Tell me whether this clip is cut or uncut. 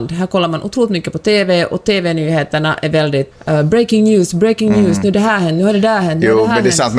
cut